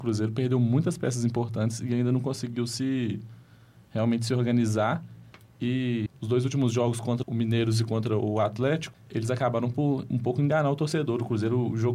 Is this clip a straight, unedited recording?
no; 1 cut; at 7.2 s

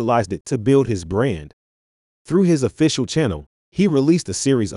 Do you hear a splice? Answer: no; 0 cuts

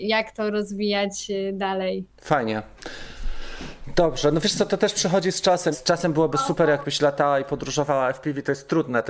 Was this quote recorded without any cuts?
no; 2 cuts; at 2.1 s, 5.7 s

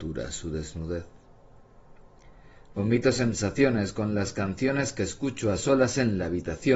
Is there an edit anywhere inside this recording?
yes; 1 cut; at 2.7 s

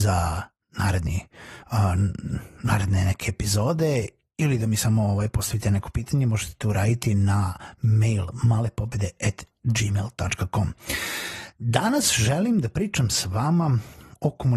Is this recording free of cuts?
yes; 0 cuts

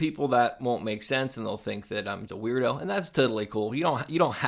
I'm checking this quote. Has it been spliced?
yes; 1 cut; at 2.3 s

